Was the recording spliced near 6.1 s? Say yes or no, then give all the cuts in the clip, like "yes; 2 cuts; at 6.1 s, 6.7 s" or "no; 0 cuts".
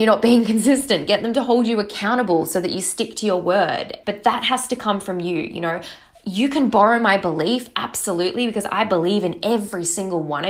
no; 1 cut; at 4.0 s